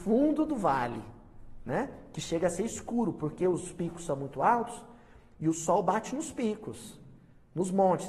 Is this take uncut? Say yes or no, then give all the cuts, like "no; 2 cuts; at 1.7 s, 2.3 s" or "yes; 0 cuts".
yes; 0 cuts